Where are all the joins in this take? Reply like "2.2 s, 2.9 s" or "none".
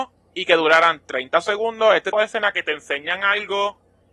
2.1 s